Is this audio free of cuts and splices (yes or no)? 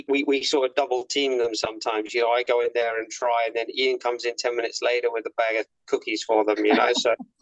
yes